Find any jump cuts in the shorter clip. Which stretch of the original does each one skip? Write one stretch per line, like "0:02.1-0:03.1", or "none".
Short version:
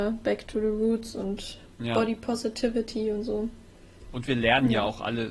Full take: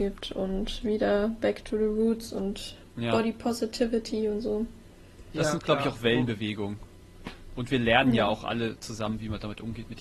0:05.2-0:07.5